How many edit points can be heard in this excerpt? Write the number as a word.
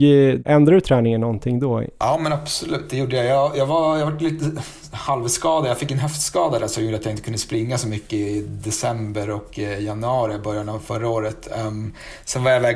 zero